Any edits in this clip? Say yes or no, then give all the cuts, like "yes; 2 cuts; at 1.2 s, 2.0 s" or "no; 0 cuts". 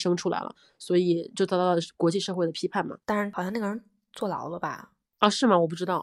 yes; 1 cut; at 3.0 s